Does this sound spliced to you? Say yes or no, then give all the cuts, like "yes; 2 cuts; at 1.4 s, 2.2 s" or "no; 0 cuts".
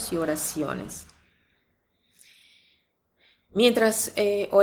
no; 0 cuts